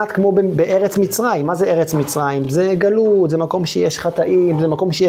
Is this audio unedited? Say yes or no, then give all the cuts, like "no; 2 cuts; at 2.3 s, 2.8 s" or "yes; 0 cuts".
yes; 0 cuts